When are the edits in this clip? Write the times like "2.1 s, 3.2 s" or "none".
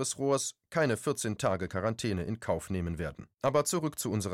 3.3 s